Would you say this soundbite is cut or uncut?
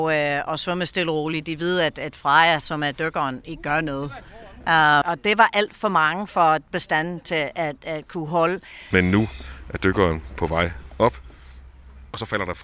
cut